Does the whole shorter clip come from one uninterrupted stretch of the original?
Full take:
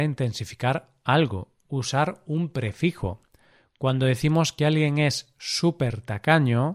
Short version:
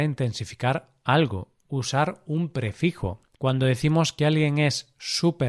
no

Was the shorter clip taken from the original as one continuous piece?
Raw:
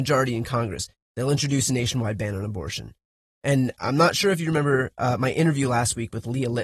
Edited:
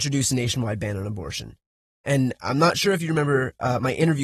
yes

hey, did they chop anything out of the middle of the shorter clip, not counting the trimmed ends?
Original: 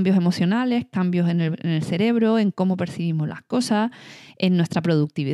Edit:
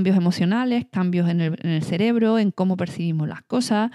no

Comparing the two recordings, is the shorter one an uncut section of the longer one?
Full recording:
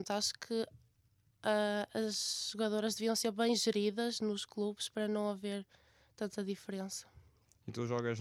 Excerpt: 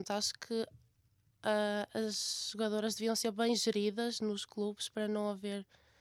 yes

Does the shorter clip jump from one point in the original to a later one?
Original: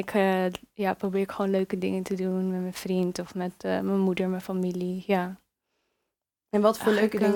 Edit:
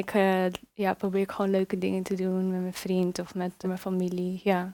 yes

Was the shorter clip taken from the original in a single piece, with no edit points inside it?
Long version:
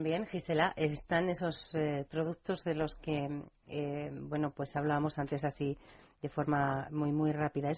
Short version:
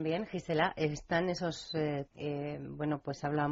no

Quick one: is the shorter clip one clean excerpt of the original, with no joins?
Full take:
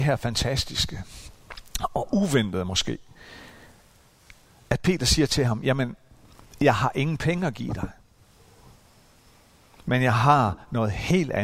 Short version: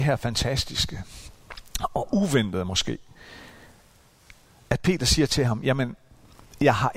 yes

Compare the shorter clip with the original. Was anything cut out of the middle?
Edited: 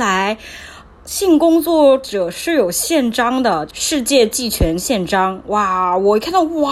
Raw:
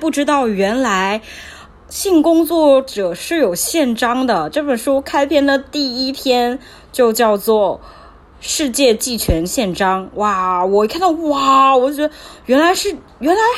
yes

